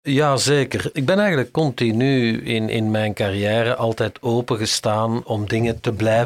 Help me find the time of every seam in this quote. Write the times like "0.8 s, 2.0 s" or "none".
none